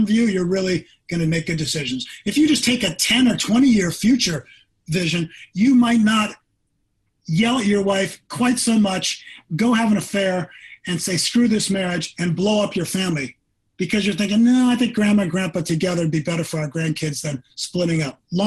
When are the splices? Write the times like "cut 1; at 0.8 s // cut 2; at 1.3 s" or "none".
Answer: none